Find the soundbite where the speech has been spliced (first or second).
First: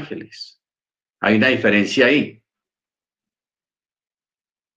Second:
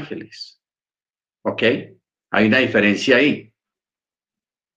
first